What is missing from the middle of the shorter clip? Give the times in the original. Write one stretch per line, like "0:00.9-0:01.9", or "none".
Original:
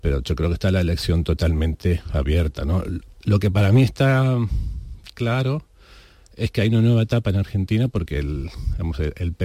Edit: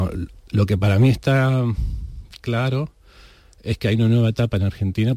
none